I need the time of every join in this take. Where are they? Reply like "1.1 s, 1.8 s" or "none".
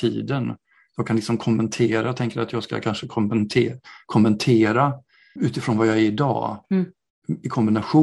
5.4 s